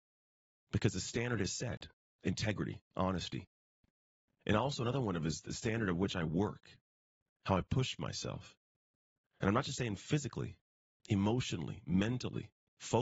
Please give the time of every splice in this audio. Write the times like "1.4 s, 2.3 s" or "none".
none